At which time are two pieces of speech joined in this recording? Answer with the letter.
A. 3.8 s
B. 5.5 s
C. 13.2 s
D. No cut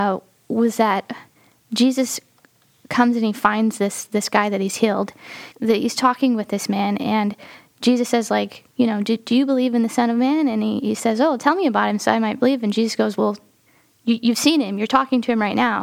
B